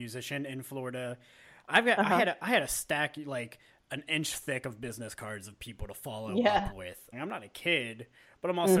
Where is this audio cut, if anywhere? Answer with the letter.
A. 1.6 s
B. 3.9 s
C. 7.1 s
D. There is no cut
C